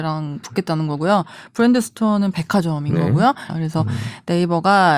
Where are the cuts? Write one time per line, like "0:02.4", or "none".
0:03.5